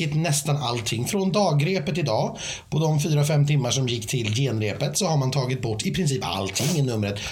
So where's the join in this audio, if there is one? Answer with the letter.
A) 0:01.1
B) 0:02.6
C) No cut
C